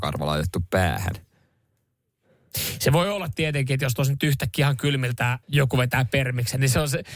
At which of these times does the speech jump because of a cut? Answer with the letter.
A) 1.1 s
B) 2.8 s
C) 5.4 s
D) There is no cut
C